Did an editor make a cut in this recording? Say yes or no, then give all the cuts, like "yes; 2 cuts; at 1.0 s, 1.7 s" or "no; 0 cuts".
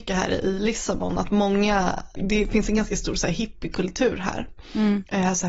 yes; 1 cut; at 2.2 s